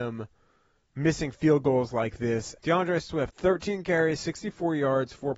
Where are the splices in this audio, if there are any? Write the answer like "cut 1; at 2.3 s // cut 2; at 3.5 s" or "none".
cut 1; at 2.6 s